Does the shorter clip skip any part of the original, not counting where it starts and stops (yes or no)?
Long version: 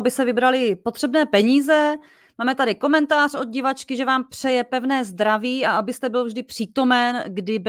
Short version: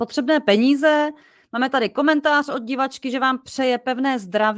no